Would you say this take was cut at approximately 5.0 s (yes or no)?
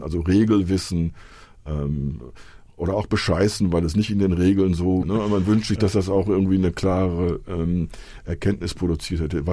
yes